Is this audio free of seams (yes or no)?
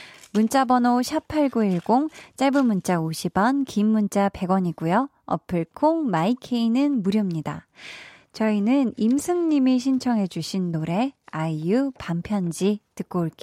yes